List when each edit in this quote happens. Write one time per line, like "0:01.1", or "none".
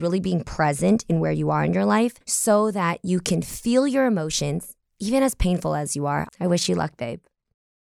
0:02.2
0:06.3

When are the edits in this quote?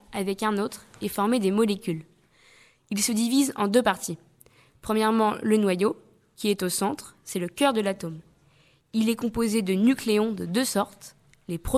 none

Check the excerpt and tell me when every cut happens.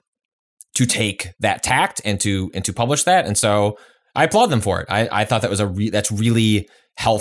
none

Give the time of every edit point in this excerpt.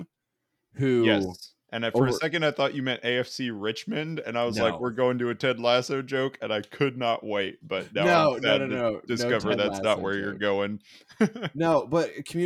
none

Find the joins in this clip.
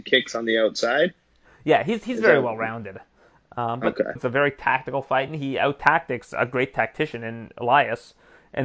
0:04.2

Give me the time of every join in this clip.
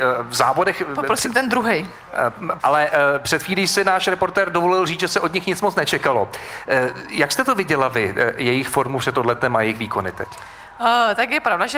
0:02.6

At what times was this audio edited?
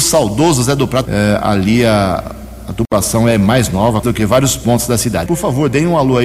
0:01.0
0:04.0
0:05.3

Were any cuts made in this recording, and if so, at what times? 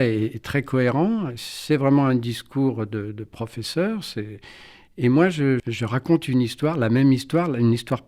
0:05.6

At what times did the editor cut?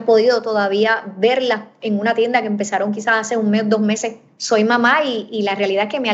0:04.3

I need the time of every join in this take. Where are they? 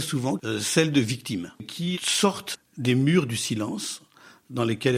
0:01.9

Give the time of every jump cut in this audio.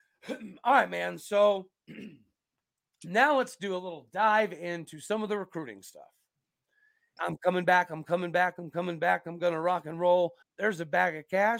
0:07.2
0:10.4

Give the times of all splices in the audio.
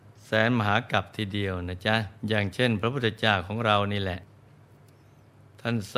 0:02.2

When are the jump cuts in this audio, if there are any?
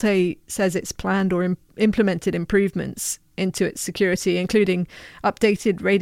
none

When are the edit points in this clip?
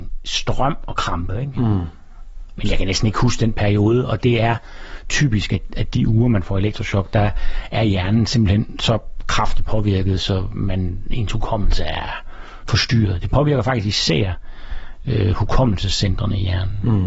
0:01.5

